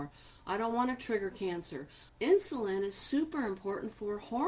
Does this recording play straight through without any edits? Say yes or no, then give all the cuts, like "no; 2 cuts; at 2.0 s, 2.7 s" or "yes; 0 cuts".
no; 1 cut; at 2.1 s